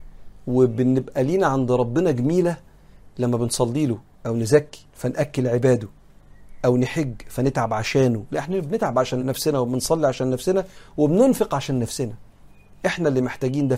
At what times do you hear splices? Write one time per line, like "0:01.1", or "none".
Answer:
0:04.9
0:09.2